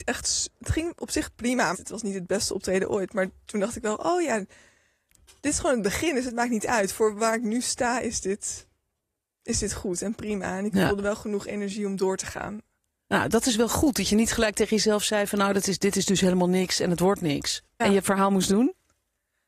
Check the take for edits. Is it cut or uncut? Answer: cut